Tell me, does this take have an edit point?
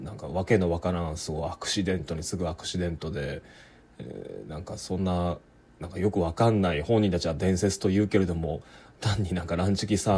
no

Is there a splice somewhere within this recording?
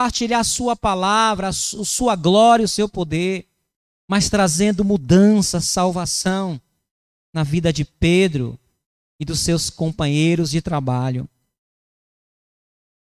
no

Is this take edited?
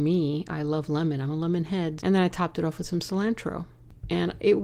yes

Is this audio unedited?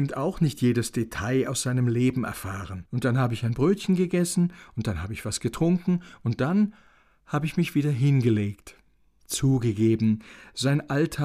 yes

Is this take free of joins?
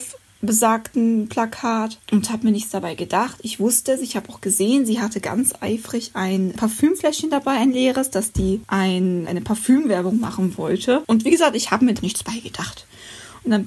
no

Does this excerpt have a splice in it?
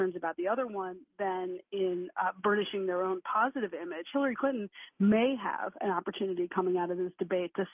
no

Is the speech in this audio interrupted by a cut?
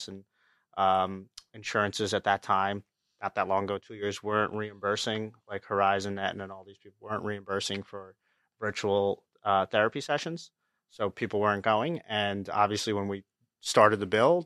no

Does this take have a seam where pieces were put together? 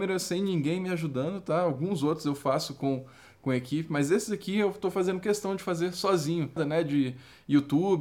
yes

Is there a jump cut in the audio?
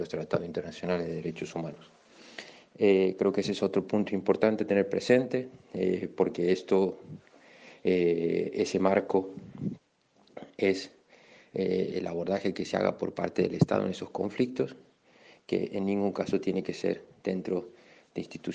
yes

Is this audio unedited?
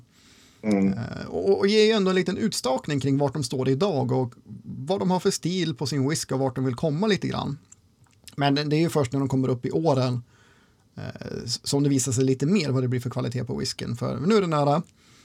yes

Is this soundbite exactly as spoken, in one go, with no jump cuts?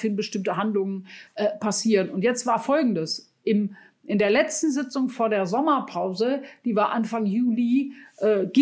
yes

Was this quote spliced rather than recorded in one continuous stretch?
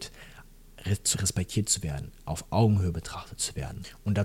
yes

